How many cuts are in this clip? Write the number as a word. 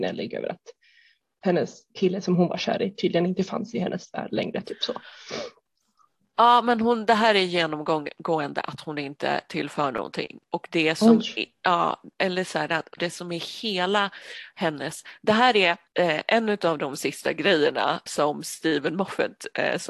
three